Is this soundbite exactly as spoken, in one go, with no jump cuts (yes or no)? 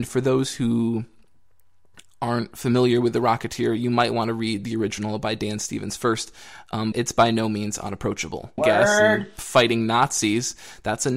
no